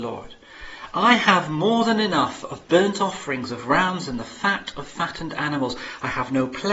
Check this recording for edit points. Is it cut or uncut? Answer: uncut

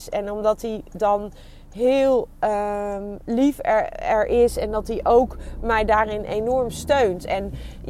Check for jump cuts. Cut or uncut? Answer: uncut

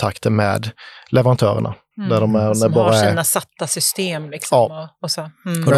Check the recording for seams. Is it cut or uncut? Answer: cut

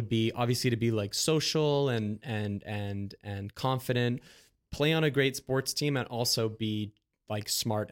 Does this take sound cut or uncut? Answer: uncut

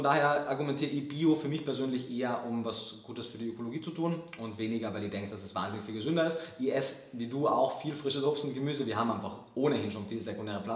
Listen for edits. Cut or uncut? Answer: uncut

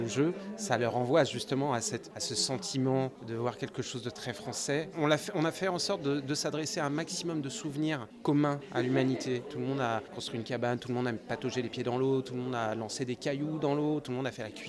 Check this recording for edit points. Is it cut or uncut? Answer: cut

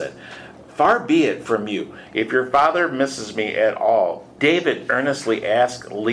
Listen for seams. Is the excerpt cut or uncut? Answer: cut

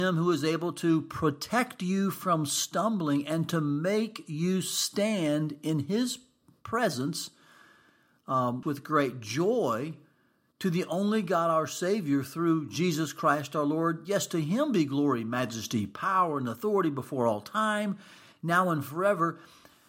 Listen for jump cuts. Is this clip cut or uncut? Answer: cut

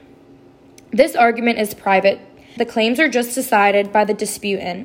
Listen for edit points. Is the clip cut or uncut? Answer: cut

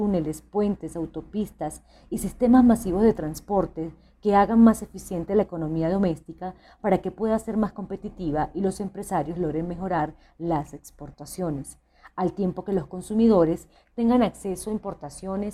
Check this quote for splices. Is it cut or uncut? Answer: uncut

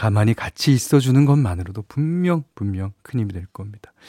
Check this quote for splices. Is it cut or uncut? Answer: uncut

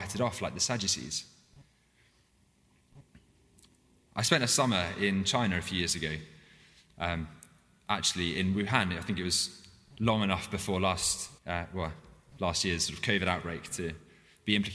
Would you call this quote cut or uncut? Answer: cut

